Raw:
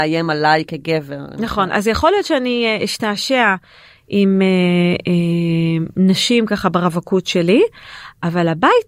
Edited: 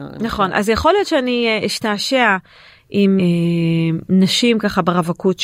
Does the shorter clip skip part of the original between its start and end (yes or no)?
yes